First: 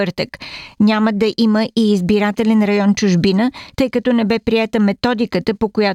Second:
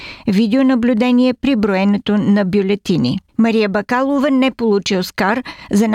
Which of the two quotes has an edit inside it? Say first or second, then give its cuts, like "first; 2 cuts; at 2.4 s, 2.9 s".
second; 1 cut; at 3.3 s